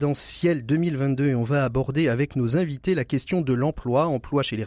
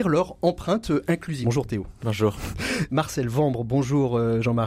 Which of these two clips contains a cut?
second; 2 cuts; at 1.4 s, 2.9 s

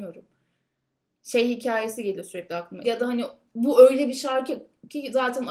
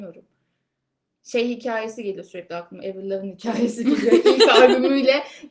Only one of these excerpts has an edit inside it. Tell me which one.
first; 1 cut; at 2.8 s

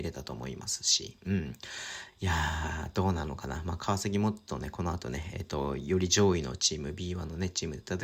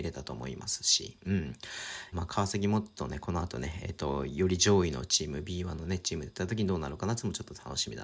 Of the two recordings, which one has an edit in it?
second; 1 cut; at 2.1 s

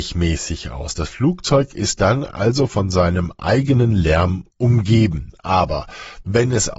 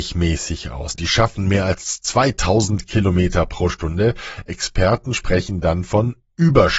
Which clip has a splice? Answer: second; 1 cut; at 0.9 s

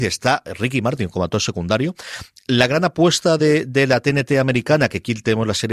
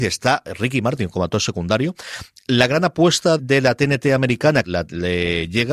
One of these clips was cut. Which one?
second; 2 cuts; at 3.4 s, 4.6 s

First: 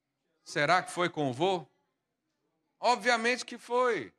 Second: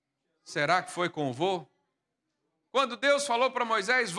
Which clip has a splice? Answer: second; 1 cut; at 2.7 s

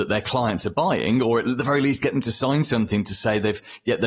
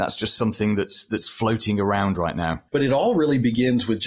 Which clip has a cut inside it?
second; 1 cut; at 2.7 s

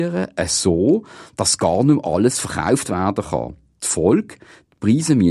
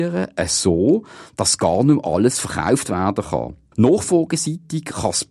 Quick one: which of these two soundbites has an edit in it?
second; 1 cut; at 3.7 s

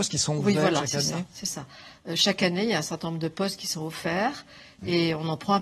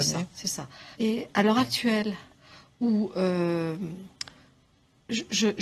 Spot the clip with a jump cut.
second; 1 cut; at 0.9 s

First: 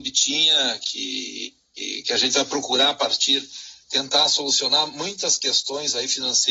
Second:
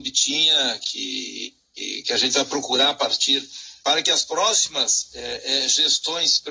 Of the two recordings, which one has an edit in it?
second; 1 cut; at 3.8 s

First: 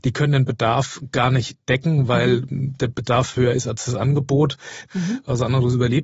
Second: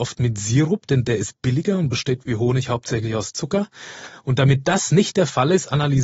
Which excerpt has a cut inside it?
first; 1 cut; at 4.9 s

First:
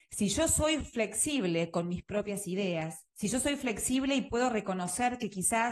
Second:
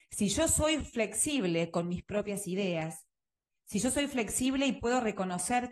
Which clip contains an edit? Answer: first; 1 cut; at 3.1 s

